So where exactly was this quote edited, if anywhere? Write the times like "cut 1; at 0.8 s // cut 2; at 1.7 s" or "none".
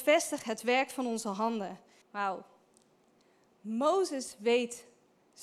cut 1; at 2.0 s